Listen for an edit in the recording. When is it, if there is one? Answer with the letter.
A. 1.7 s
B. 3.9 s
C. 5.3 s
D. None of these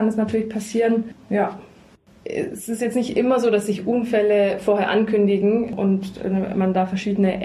D